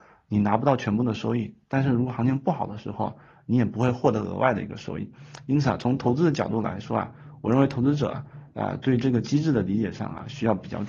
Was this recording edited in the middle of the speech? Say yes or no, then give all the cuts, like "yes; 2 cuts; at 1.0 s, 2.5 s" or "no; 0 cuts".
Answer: no; 0 cuts